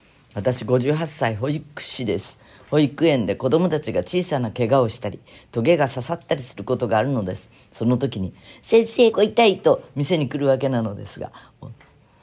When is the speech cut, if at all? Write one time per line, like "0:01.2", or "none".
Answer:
0:09.1